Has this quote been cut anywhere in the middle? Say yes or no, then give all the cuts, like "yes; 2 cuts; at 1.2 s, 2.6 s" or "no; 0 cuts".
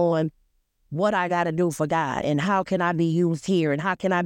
yes; 1 cut; at 2.2 s